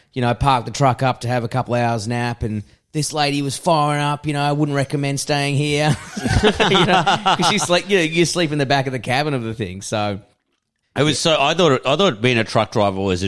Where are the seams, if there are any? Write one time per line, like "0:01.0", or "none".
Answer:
0:10.8